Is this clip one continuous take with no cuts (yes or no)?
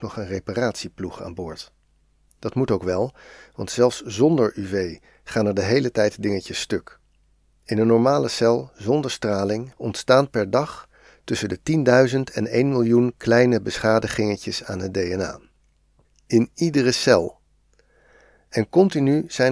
no